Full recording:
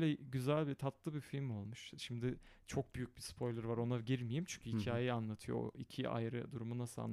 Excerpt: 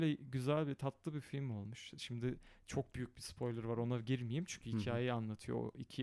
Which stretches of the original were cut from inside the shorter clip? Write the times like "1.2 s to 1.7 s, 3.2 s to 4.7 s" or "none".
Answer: none